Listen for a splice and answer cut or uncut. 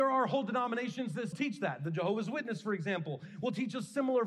cut